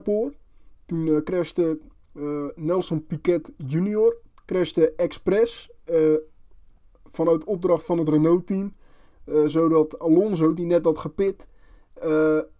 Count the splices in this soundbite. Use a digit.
0